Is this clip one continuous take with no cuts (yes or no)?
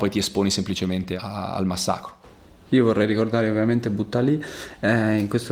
yes